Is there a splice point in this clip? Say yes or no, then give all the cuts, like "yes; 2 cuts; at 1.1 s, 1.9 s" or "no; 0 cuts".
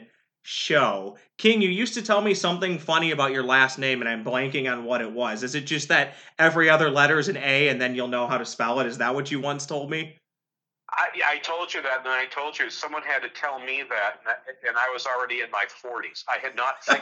no; 0 cuts